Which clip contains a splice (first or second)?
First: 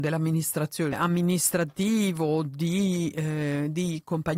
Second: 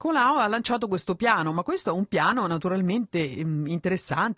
first